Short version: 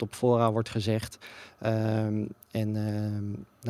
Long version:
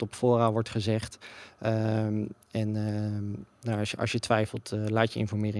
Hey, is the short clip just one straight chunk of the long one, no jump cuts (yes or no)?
yes